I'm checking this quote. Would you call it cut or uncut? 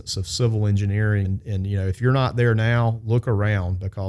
cut